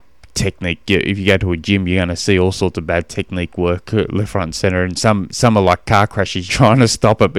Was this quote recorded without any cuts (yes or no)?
no